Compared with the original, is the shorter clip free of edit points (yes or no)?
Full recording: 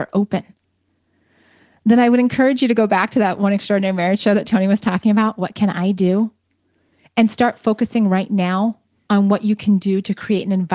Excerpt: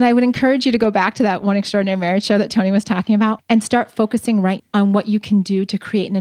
no